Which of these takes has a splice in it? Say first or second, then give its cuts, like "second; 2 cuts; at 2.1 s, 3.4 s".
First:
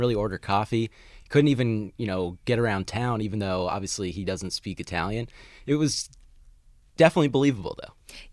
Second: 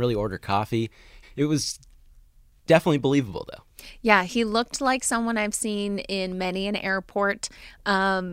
second; 1 cut; at 1.2 s